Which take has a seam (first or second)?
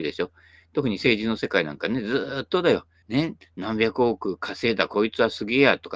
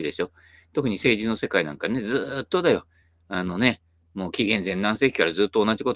first